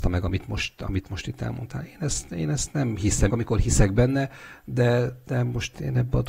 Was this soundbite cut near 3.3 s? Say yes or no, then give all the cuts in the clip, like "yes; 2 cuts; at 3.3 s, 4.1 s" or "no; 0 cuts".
yes; 1 cut; at 3.3 s